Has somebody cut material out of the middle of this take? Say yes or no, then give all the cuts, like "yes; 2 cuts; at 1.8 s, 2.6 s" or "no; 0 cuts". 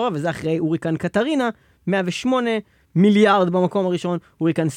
no; 0 cuts